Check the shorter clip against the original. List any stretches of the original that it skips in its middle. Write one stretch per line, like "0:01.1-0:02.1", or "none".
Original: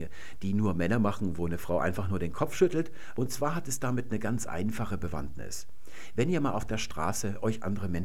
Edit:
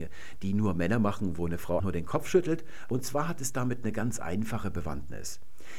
0:01.8-0:02.1